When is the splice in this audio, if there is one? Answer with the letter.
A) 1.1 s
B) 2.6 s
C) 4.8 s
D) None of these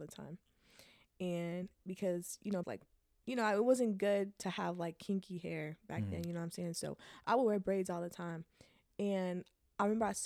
B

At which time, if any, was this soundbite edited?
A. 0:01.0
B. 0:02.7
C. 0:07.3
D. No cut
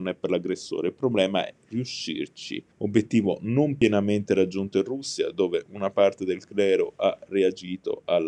B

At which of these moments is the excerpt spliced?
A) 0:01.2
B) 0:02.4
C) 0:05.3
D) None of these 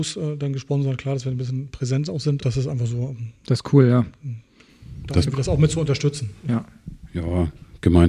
B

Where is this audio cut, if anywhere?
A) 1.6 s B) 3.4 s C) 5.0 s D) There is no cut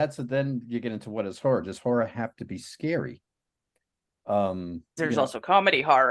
C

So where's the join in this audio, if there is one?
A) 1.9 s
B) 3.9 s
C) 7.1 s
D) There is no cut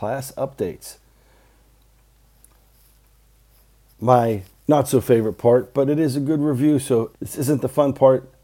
C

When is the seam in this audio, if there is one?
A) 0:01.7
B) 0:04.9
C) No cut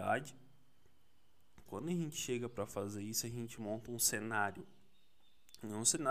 A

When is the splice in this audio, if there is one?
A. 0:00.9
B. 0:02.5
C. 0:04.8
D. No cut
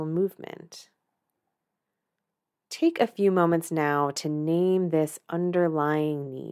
D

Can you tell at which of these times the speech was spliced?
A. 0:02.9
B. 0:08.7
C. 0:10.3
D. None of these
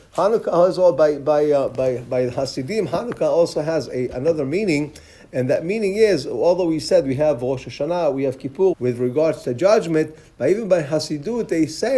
B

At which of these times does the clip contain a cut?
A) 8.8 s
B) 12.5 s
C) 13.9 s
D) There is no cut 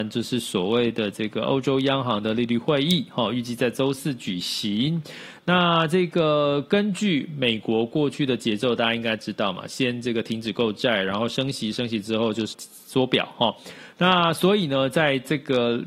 B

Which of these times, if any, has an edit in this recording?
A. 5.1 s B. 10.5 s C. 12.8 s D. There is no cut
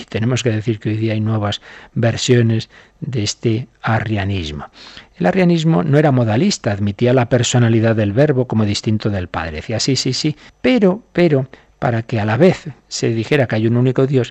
B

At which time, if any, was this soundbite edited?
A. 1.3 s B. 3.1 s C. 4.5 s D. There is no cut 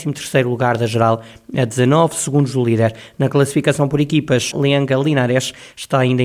C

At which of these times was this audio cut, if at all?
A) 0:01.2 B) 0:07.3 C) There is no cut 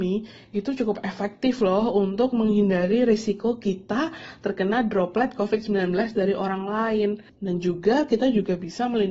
B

